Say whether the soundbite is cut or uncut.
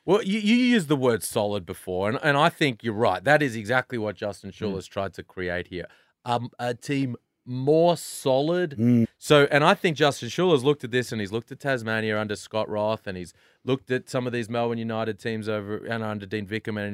cut